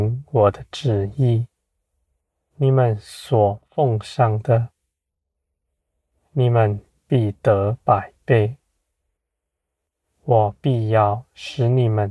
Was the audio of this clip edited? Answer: yes; 1 cut; at 2.5 s

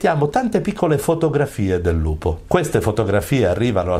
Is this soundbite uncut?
no; 1 cut; at 2.5 s

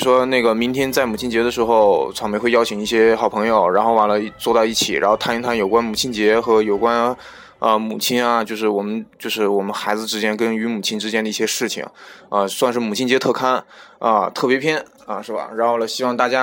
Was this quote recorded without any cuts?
yes; 0 cuts

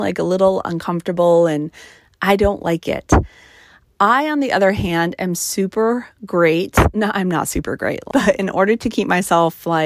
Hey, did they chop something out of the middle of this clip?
yes; 1 cut; at 8.1 s

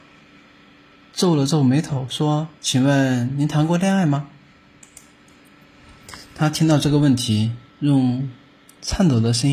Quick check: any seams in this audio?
yes; 1 cut; at 7.7 s

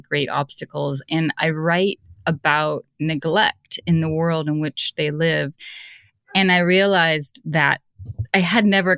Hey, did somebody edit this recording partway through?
no; 0 cuts

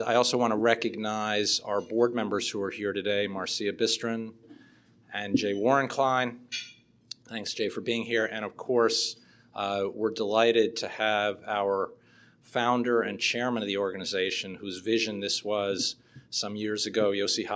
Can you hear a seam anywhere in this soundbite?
yes; 1 cut; at 4.4 s

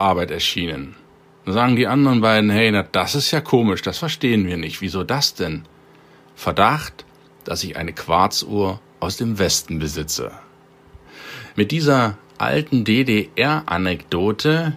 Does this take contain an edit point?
yes; 1 cut; at 11.5 s

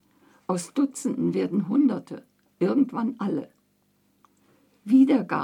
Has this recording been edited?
yes; 1 cut; at 2.5 s

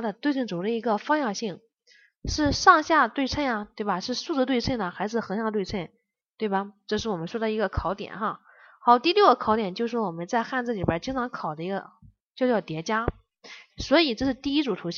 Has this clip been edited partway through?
yes; 1 cut; at 13.7 s

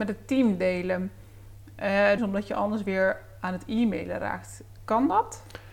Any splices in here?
yes; 1 cut; at 2.2 s

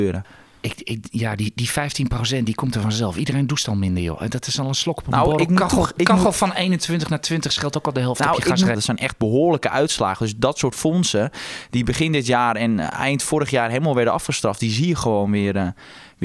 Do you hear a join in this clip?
yes; 1 cut; at 8.7 s

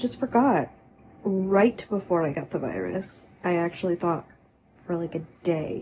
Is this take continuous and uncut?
no; 1 cut; at 1.2 s

